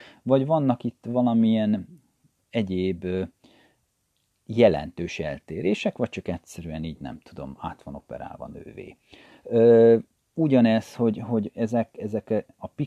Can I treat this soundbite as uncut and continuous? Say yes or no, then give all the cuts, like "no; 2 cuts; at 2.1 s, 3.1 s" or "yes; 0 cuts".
yes; 0 cuts